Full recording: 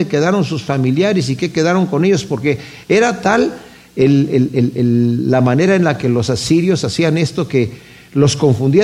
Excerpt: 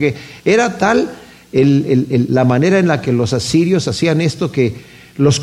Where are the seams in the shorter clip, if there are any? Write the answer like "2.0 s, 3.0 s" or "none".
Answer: 2.3 s